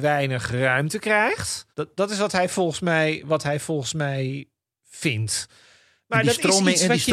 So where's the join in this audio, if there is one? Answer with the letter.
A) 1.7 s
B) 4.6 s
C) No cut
A